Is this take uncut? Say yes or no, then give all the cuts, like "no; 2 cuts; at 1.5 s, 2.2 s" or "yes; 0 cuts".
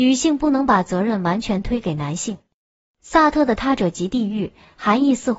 yes; 0 cuts